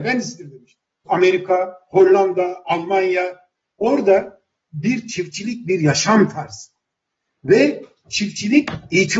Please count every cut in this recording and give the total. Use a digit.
1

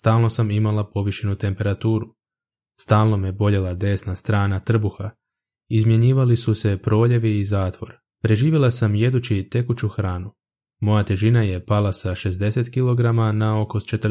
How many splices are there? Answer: 1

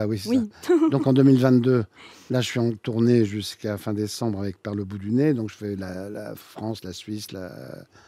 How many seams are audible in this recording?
0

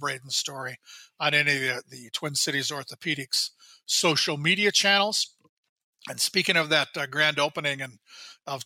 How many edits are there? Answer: 0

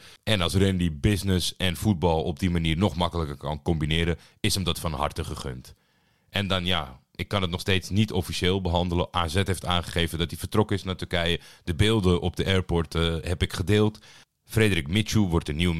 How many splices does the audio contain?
0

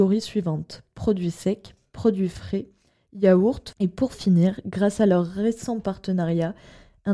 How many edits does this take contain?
1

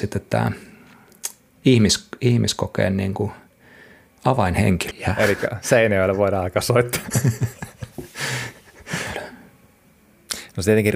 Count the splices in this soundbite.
2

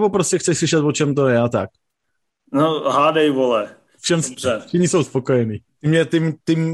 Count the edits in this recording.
2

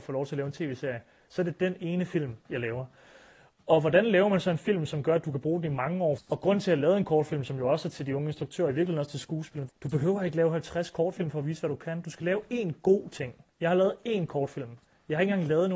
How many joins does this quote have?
2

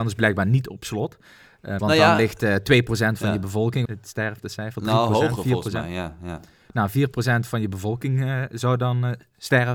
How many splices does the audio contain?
2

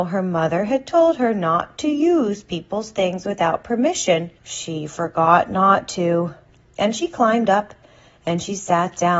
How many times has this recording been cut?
1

